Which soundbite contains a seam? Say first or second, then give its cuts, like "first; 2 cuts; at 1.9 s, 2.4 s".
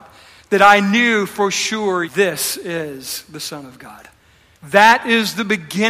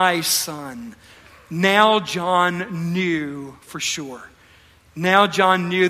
first; 2 cuts; at 2.0 s, 4.6 s